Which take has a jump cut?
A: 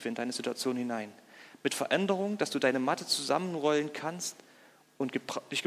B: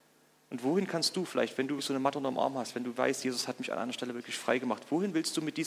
B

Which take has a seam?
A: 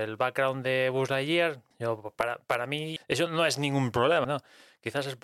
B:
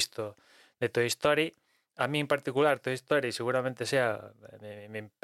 A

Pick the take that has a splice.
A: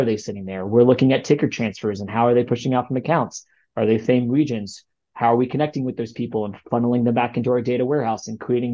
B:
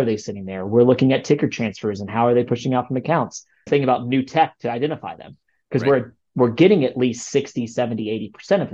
B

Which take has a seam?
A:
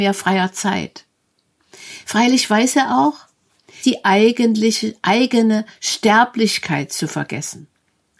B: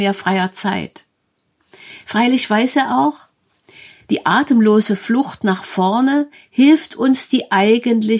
A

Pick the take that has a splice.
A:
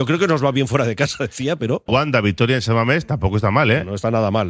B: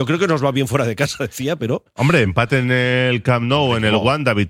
A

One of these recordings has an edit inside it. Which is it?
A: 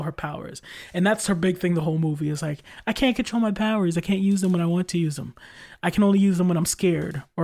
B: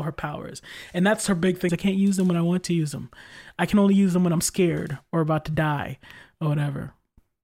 B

